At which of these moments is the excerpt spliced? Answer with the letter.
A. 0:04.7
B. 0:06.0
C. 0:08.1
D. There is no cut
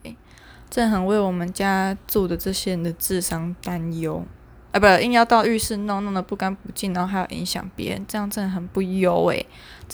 A